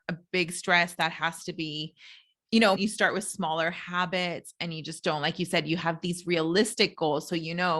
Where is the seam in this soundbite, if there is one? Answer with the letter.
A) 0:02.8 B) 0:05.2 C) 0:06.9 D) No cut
A